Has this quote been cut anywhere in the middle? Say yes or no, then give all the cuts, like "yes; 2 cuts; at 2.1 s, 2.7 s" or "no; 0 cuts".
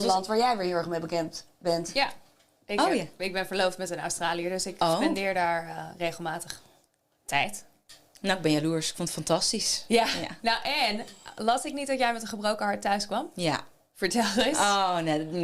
no; 0 cuts